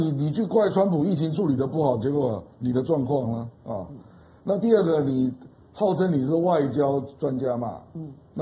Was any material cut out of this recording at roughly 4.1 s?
no; 0 cuts

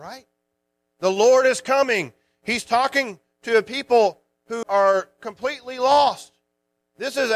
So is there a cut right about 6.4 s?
no; 1 cut; at 4.6 s

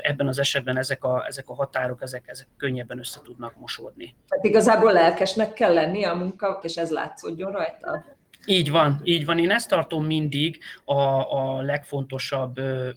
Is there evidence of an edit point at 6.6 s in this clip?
yes; 1 cut; at 6.6 s

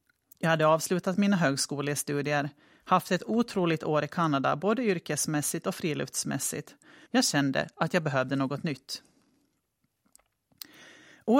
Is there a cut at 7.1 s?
yes; 1 cut; at 7.1 s

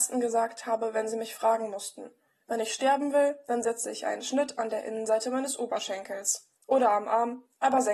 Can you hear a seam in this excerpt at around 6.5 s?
no; 0 cuts

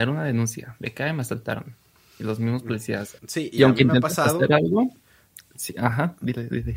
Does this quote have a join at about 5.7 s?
no; 1 cut; at 3.2 s

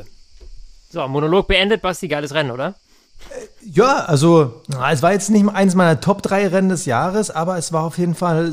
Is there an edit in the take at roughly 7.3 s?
no; 0 cuts

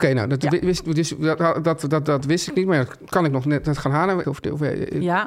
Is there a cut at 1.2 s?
no; 1 cut; at 4.2 s

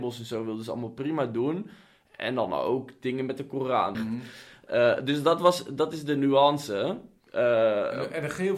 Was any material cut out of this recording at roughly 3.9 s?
yes; 1 cut; at 3.9 s

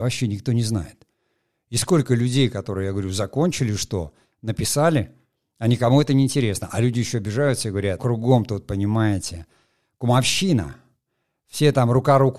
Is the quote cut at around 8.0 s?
yes; 1 cut; at 8.0 s

